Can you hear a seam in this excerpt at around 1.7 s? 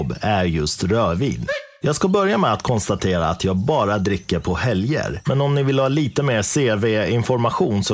yes; 2 cuts; at 1.7 s, 5.3 s

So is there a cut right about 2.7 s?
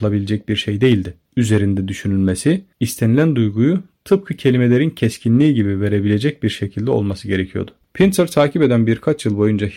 yes; 2 cuts; at 2.7 s, 7.8 s

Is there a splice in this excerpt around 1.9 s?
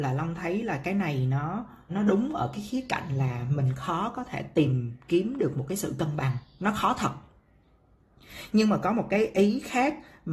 yes; 1 cut; at 1.9 s

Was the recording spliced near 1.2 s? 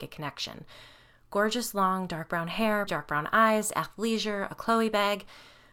no; 1 cut; at 2.9 s

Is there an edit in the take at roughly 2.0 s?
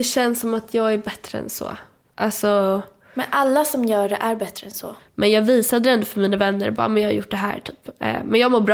no; 1 cut; at 5.0 s

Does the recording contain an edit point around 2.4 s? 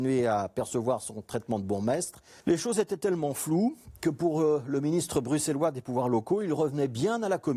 yes; 1 cut; at 2.4 s

